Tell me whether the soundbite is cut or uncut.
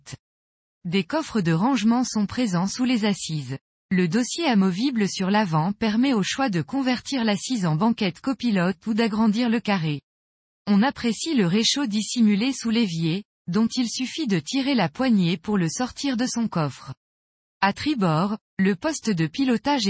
uncut